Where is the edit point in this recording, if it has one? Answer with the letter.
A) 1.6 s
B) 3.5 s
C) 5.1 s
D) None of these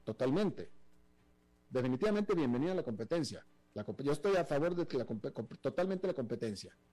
A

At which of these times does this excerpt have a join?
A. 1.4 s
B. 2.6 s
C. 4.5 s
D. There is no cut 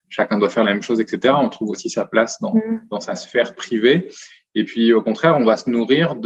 D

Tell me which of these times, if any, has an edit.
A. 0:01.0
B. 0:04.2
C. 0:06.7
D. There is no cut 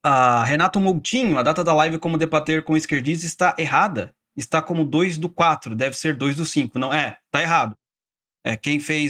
D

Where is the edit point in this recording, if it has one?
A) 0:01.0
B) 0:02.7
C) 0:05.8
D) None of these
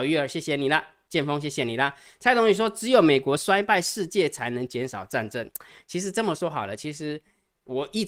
D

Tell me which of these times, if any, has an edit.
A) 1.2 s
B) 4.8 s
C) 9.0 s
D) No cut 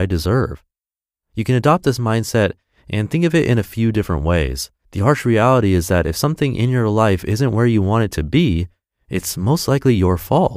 B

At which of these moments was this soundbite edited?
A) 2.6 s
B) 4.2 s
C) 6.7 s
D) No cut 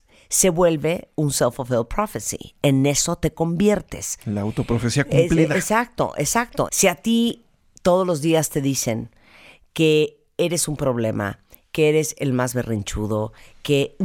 C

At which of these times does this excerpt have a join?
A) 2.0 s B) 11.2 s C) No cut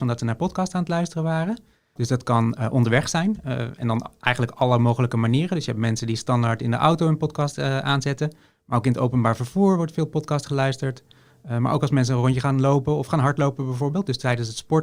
A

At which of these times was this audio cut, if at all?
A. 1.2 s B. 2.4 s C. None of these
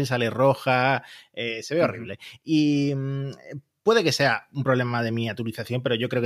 C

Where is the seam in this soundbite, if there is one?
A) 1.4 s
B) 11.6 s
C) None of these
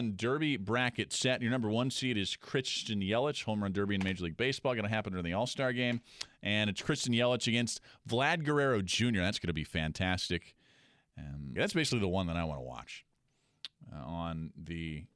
B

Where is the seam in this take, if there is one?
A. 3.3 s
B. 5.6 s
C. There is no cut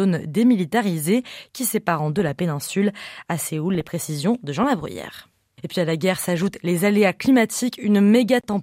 B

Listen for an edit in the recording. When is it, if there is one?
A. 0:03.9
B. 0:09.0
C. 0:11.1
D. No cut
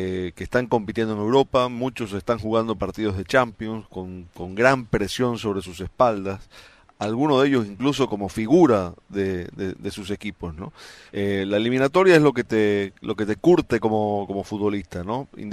C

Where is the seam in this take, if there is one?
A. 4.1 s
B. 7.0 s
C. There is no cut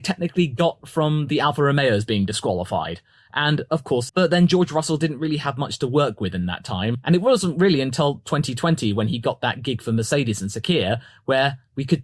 A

